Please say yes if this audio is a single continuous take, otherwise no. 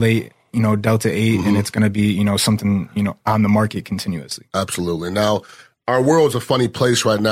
yes